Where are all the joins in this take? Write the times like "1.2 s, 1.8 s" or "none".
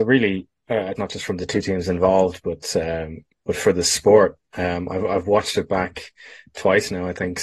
1.0 s

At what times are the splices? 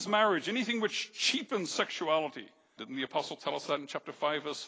2.8 s

